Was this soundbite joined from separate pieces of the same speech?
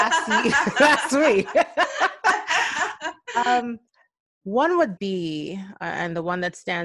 yes; 1 cut; at 5.0 s

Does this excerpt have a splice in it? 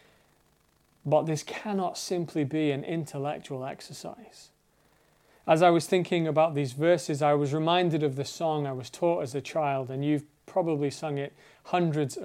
no; 0 cuts

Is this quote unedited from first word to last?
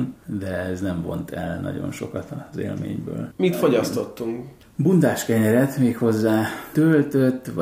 yes; 0 cuts

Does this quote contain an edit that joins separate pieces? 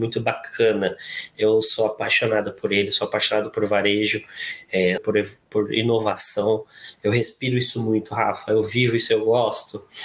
yes; 1 cut; at 5.0 s

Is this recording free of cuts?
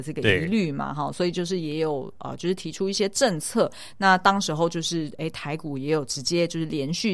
yes; 0 cuts

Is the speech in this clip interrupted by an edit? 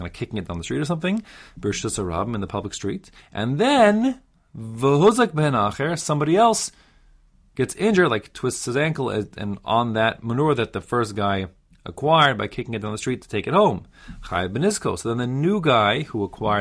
no; 0 cuts

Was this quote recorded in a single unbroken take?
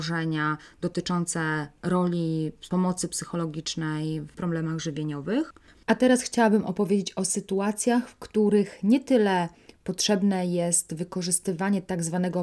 yes; 0 cuts

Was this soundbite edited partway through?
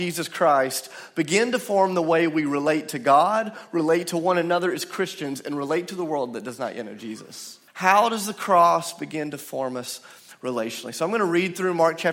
yes; 1 cut; at 7.7 s

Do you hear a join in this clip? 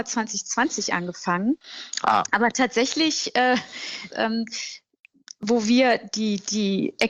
yes; 1 cut; at 4.1 s

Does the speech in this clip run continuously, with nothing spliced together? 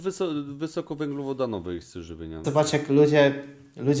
no; 1 cut; at 2.4 s

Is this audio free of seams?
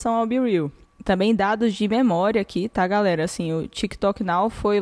yes; 0 cuts

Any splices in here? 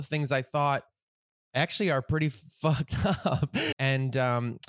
yes; 1 cut; at 3.7 s

